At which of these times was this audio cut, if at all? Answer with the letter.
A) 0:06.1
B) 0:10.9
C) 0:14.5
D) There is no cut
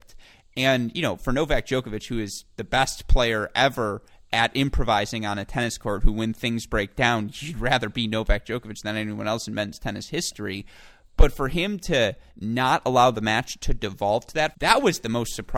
C